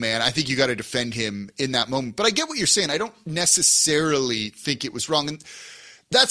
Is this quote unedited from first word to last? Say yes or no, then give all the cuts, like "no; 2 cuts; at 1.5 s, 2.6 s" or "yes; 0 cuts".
yes; 0 cuts